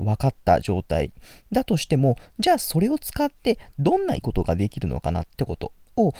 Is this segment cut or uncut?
cut